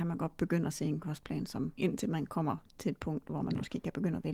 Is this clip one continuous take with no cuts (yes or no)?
no